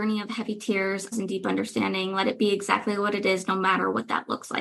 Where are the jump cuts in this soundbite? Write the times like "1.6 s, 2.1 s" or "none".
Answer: 1.1 s